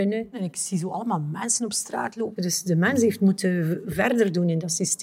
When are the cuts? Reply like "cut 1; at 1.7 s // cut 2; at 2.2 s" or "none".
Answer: cut 1; at 2.4 s